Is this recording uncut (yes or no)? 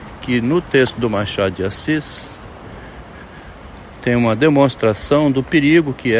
yes